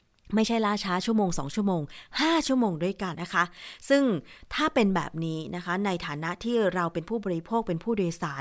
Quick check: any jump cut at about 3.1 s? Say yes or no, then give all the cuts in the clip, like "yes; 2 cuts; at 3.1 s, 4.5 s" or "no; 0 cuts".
yes; 1 cut; at 3.1 s